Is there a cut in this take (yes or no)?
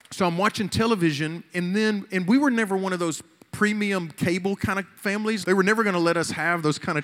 yes